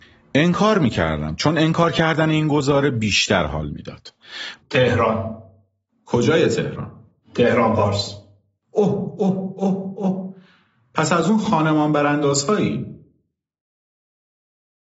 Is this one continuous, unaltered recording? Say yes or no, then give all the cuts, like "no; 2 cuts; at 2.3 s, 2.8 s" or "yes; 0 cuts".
no; 1 cut; at 4.6 s